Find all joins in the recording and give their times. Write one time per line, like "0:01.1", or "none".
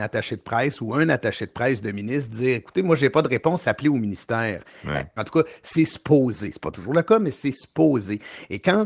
0:05.2